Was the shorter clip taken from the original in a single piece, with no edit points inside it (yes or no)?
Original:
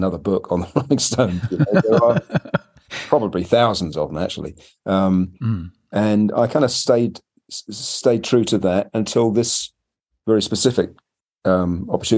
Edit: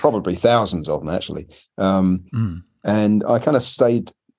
yes